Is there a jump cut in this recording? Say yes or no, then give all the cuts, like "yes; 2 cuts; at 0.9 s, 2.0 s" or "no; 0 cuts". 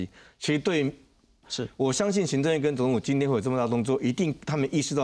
yes; 1 cut; at 1.4 s